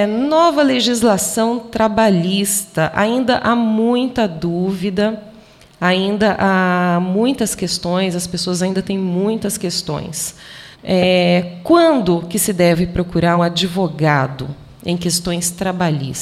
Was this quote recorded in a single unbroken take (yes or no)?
no